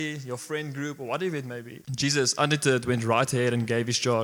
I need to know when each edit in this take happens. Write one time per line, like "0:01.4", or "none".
0:01.8